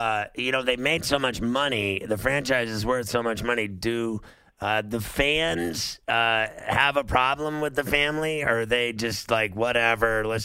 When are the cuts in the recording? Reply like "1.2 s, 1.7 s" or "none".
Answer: none